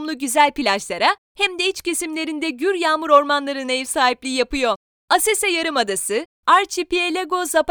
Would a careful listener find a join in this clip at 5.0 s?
no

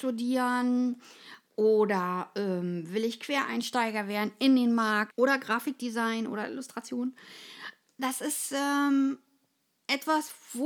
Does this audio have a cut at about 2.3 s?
no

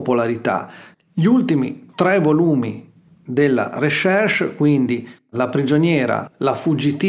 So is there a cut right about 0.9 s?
yes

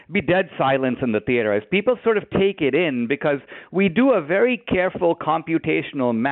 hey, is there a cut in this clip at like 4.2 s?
no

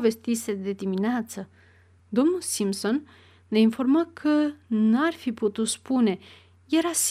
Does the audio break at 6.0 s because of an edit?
no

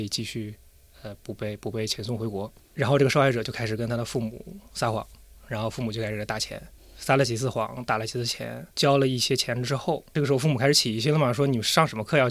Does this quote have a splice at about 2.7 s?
no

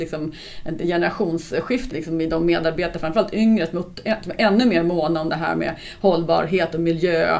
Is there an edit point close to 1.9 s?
yes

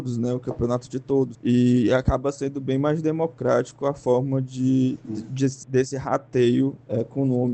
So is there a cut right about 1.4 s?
no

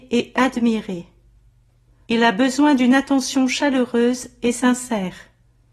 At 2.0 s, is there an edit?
yes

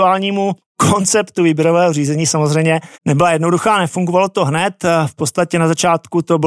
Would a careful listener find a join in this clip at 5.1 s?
no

